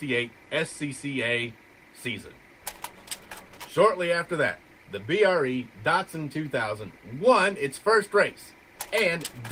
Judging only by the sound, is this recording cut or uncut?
uncut